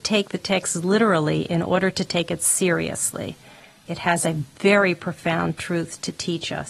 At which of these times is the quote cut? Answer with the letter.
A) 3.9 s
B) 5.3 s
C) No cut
A